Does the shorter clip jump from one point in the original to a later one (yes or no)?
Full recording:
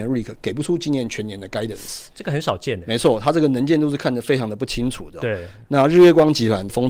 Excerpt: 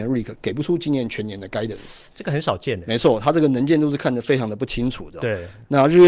no